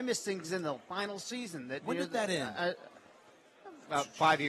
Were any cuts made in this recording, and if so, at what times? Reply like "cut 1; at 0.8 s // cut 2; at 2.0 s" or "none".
none

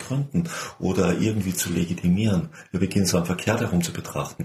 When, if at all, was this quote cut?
cut 1; at 3.1 s

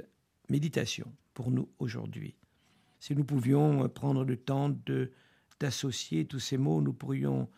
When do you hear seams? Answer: cut 1; at 2.9 s

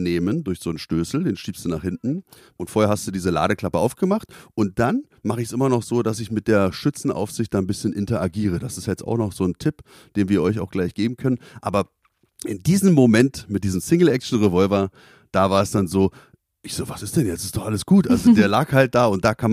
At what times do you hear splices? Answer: none

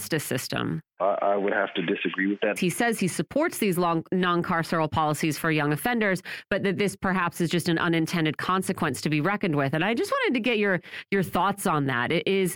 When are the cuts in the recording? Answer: cut 1; at 1.0 s // cut 2; at 2.6 s

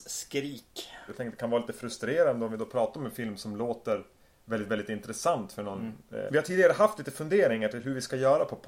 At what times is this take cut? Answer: cut 1; at 1.1 s // cut 2; at 6.3 s

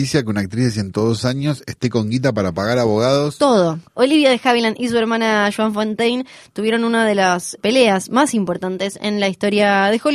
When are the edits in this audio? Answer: cut 1; at 3.8 s // cut 2; at 7.6 s

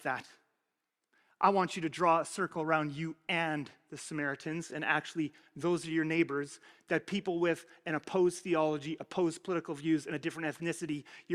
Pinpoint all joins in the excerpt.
none

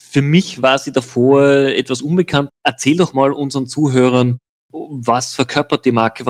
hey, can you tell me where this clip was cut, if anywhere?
cut 1; at 2.5 s

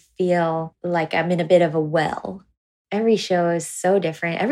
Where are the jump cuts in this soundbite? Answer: none

